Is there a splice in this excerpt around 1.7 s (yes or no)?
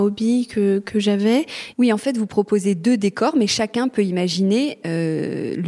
yes